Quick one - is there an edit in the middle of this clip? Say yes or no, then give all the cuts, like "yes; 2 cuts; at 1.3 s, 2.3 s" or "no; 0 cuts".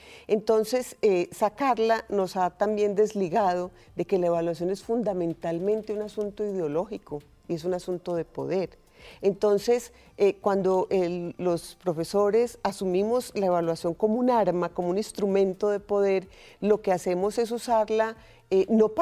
no; 0 cuts